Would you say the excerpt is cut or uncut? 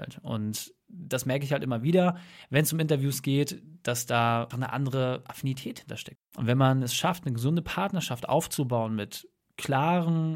cut